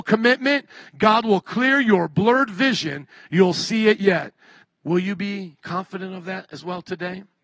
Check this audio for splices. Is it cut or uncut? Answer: cut